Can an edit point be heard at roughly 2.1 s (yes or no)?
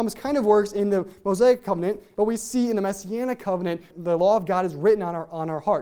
yes